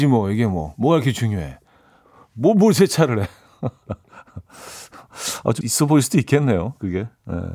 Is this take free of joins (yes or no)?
no